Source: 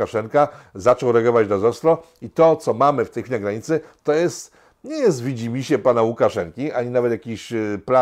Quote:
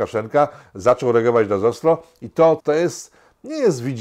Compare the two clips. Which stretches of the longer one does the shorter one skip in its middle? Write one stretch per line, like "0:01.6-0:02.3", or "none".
0:02.6-0:04.0